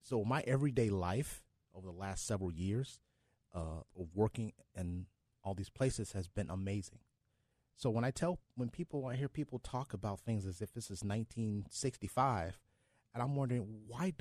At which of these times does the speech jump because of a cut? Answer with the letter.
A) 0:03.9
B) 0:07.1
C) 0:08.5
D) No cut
A